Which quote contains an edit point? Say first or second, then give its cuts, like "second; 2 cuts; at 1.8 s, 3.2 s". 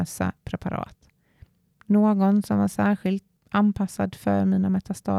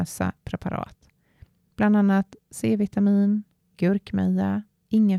first; 1 cut; at 1.7 s